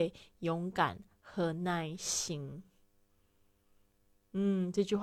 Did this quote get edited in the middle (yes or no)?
no